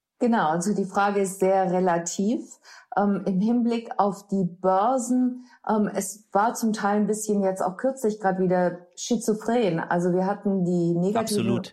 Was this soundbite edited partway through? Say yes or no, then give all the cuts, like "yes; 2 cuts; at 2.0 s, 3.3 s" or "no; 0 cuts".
no; 0 cuts